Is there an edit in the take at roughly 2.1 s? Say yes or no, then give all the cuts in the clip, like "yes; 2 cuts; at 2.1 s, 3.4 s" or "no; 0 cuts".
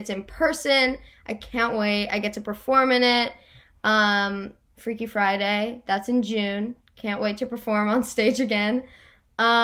no; 2 cuts; at 4.7 s, 5.8 s